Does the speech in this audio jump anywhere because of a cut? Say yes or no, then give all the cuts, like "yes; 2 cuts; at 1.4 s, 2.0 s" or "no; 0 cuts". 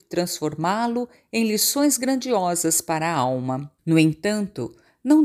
yes; 1 cut; at 3.8 s